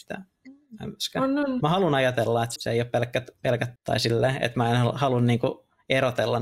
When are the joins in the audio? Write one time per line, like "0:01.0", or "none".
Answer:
0:02.6
0:03.8